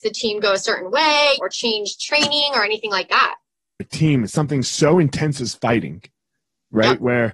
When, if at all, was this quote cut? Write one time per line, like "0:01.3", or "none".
0:01.4
0:03.8